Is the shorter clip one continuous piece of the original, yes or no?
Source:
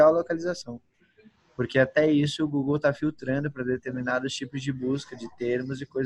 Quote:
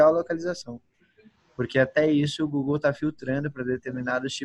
yes